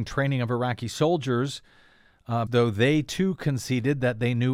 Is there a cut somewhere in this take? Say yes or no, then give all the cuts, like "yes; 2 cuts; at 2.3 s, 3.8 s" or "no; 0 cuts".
yes; 1 cut; at 2.5 s